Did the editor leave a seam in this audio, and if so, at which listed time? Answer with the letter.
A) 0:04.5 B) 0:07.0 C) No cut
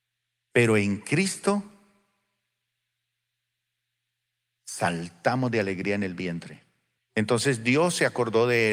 B